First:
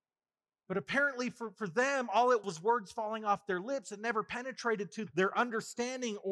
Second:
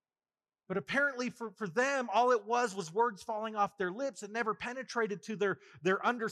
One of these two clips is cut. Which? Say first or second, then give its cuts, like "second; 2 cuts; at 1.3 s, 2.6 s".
first; 2 cuts; at 2.4 s, 5.1 s